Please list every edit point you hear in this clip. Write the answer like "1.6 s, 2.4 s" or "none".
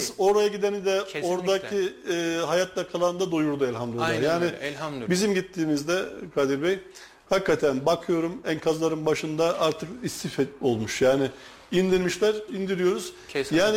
12.5 s

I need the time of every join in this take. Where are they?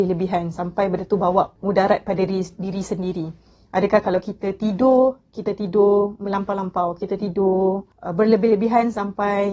none

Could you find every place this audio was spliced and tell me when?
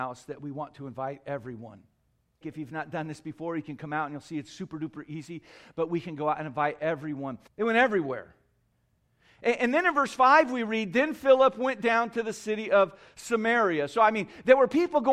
2.4 s, 7.5 s

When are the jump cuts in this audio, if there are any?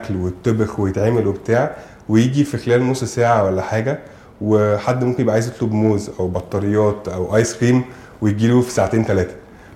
none

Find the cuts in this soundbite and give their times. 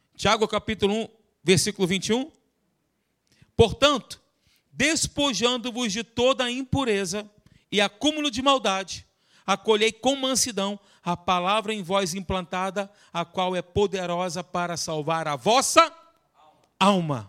none

